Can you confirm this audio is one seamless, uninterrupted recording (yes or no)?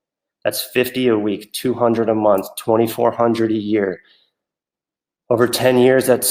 yes